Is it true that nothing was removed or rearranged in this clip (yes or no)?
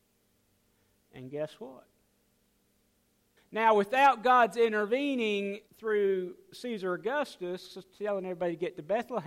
no